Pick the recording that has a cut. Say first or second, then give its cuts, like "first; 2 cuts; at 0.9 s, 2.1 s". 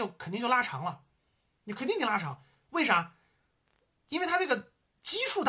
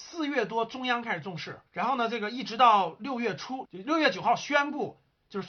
second; 2 cuts; at 1.7 s, 3.6 s